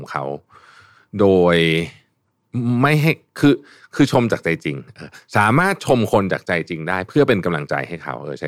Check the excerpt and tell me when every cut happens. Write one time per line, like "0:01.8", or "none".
none